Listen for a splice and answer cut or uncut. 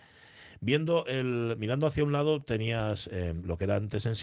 uncut